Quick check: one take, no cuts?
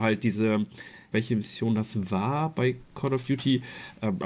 no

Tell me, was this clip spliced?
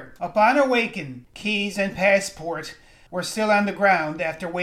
yes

